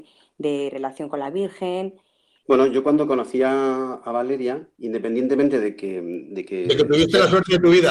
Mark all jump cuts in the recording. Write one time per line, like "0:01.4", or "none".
0:02.4
0:04.7